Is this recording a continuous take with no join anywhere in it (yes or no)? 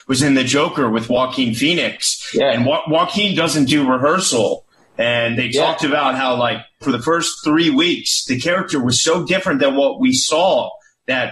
no